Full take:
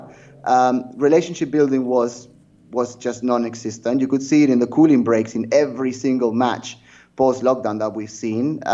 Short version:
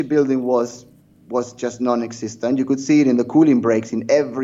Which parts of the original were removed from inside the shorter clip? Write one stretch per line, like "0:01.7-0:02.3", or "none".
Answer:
none